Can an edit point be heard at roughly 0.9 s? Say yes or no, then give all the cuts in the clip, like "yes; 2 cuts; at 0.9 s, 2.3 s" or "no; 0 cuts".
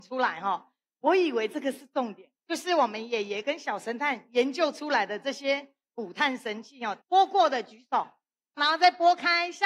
no; 3 cuts; at 2.4 s, 7.0 s, 8.6 s